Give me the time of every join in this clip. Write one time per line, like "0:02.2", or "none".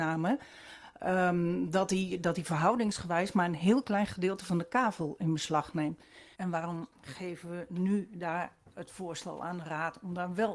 0:06.3